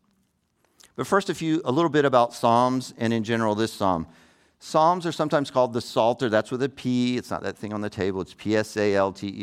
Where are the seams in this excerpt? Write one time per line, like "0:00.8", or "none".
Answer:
none